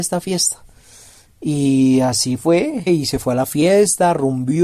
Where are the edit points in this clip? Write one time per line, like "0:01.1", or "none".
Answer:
0:02.9